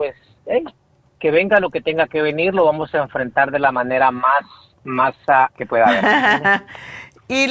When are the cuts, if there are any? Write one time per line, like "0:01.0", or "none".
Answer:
0:05.5